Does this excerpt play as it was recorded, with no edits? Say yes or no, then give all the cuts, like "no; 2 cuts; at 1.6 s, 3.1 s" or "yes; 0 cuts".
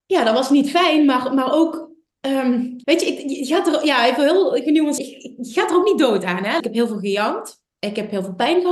no; 3 cuts; at 2.8 s, 5.0 s, 6.6 s